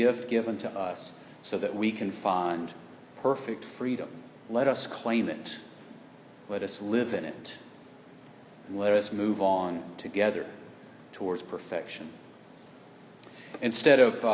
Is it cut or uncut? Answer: cut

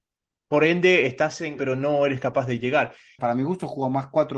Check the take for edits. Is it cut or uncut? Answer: cut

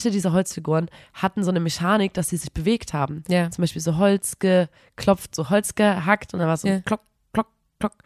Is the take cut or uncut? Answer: uncut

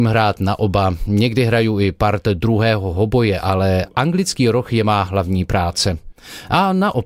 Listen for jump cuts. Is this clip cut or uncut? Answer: uncut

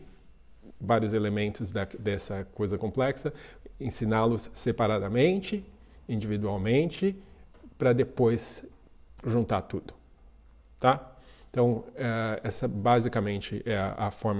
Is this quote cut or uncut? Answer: uncut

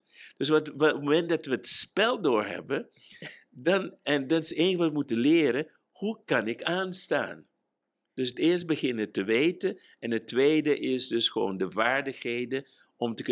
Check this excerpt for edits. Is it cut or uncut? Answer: uncut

